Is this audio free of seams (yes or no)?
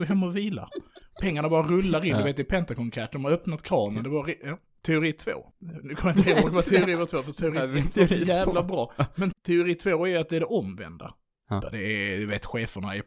no